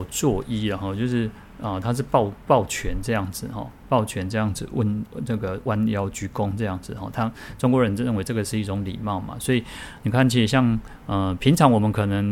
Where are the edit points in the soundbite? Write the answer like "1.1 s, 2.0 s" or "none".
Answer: none